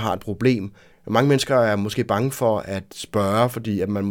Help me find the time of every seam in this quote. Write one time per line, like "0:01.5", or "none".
0:00.9